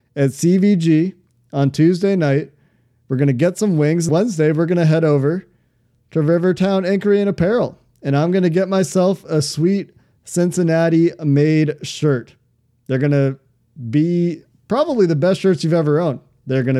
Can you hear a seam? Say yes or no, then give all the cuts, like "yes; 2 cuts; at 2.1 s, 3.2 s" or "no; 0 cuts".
yes; 1 cut; at 4.1 s